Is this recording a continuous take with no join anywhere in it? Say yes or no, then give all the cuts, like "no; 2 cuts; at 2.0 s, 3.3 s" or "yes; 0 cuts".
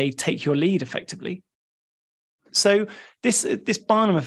no; 1 cut; at 2.5 s